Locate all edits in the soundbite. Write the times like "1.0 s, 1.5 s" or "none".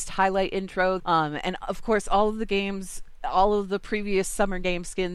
1.0 s